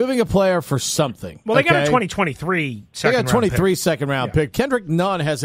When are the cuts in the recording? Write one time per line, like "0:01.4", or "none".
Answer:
0:04.5